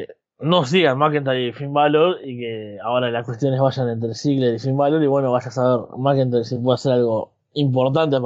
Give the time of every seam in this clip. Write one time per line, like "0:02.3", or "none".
none